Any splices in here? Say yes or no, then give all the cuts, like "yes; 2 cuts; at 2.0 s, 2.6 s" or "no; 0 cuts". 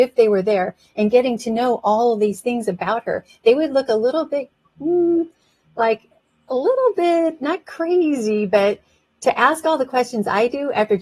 no; 0 cuts